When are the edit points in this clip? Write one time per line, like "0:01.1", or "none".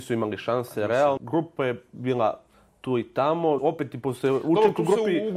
0:01.2
0:03.6